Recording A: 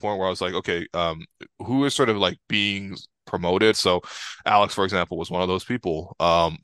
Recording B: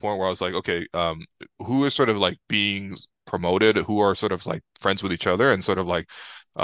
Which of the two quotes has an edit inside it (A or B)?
A